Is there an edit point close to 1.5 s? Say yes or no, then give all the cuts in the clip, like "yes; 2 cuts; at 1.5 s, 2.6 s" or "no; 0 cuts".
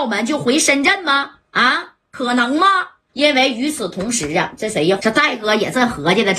no; 2 cuts; at 3.1 s, 5.0 s